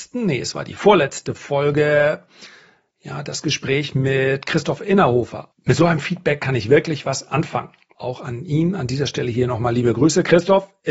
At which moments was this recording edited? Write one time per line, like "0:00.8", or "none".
0:05.5
0:07.9